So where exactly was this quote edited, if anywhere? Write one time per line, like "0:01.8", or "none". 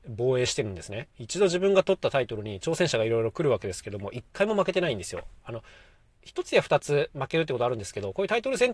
none